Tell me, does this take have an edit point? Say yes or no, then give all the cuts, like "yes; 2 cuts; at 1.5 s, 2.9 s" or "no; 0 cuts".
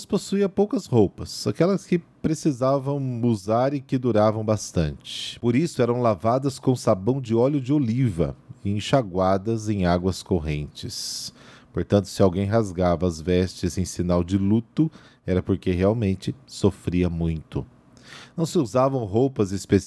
no; 0 cuts